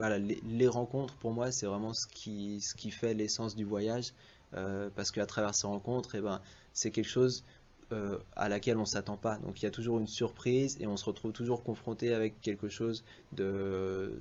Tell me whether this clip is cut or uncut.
uncut